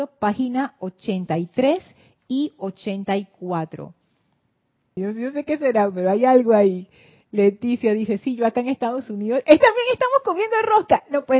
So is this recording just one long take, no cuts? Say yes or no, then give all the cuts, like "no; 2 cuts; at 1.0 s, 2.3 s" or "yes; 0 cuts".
no; 1 cut; at 5.0 s